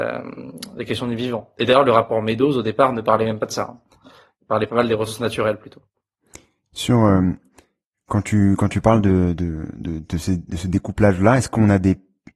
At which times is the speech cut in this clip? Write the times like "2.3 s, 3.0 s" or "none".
none